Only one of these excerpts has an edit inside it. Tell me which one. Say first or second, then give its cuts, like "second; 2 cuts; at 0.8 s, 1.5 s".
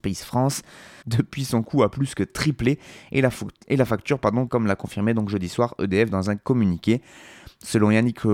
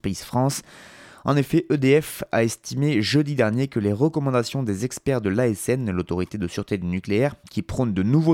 first; 2 cuts; at 1.0 s, 4.5 s